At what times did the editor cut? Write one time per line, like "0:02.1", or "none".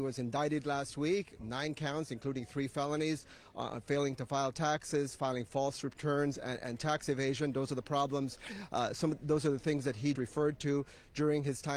0:10.2